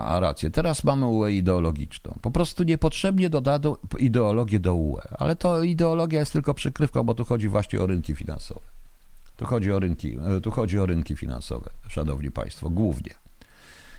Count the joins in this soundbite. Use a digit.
0